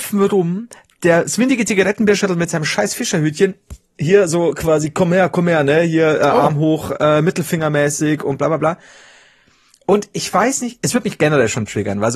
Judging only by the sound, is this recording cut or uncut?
uncut